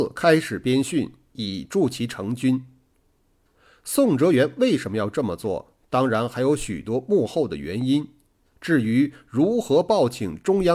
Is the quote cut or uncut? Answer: uncut